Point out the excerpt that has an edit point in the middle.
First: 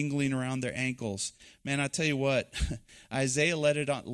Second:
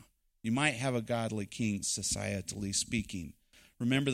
second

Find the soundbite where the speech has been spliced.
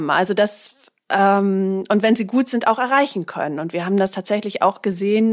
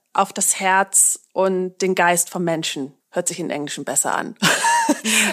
second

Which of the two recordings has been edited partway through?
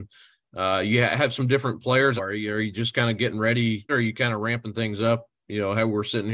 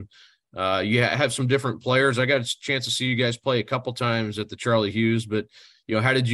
first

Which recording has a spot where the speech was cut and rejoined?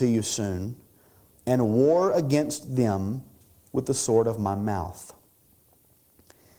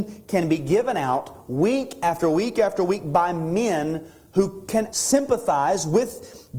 second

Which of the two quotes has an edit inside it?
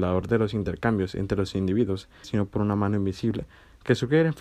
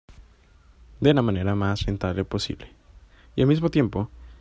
first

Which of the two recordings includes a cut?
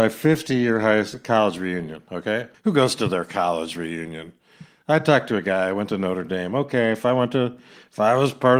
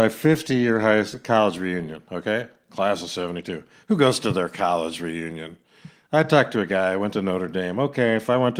first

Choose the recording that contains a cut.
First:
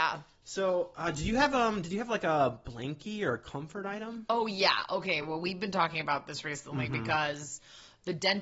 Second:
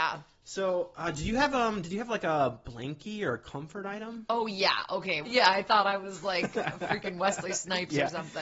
second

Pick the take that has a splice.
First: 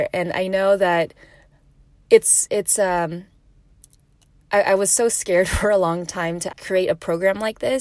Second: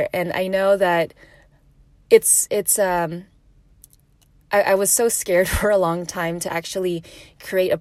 first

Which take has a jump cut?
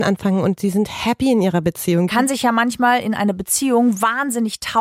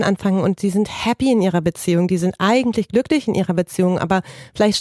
first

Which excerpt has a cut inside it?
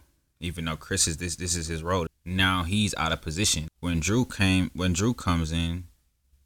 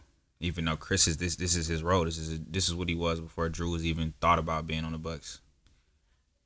first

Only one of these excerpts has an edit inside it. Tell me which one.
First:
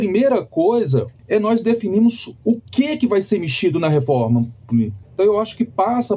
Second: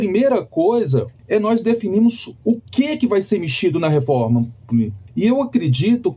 first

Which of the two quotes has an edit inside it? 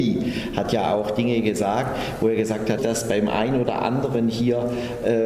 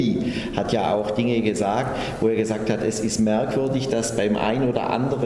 first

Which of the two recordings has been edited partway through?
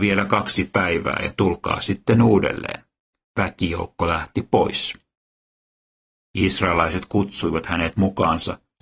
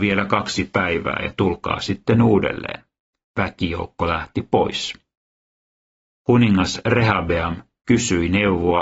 first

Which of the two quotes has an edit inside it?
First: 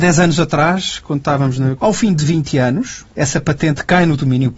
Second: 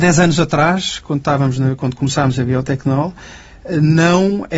first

